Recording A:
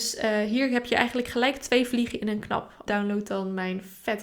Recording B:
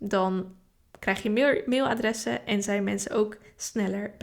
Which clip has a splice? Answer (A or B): A